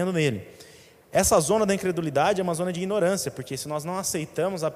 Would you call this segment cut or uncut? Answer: uncut